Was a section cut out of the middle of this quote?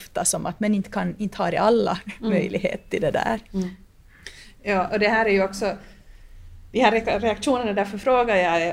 no; 0 cuts

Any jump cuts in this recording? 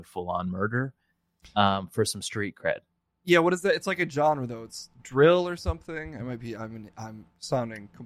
no; 0 cuts

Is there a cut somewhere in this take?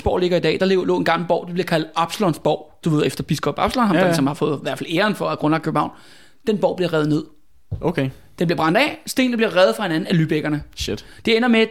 no; 0 cuts

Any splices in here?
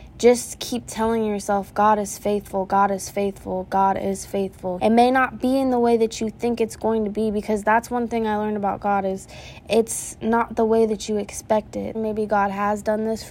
yes; 2 cuts; at 4.8 s, 11.9 s

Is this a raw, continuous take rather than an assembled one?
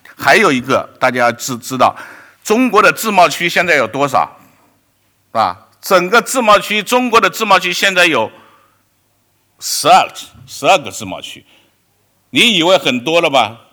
yes; 0 cuts

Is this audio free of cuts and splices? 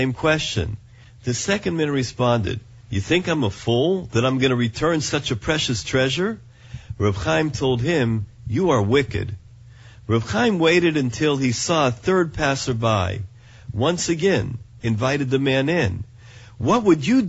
no; 1 cut; at 14.8 s

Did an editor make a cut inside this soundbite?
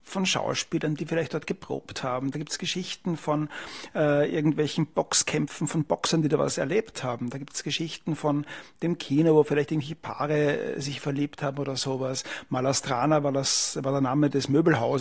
no; 0 cuts

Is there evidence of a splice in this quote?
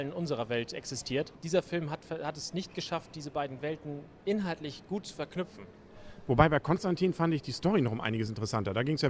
no; 0 cuts

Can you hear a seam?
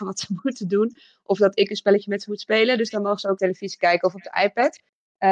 yes; 1 cut; at 3.4 s

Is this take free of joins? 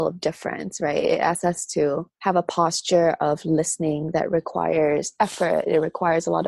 yes; 0 cuts

